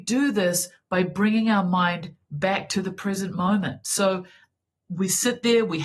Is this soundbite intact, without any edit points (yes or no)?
yes